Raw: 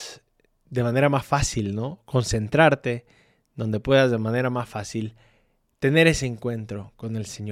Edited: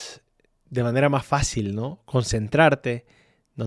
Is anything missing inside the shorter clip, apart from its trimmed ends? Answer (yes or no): no